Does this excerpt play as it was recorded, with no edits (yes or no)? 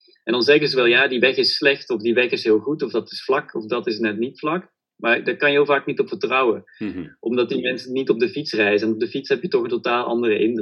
yes